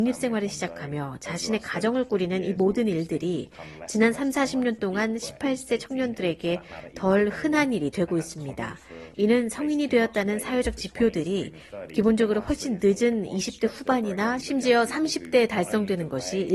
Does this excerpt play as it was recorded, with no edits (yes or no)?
no